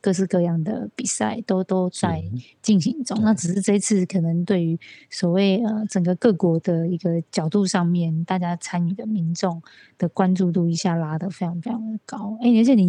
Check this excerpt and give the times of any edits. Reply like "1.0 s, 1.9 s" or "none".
none